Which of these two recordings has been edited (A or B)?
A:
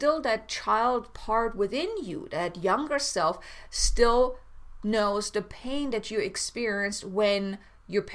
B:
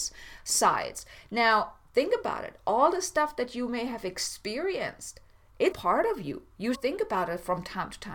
B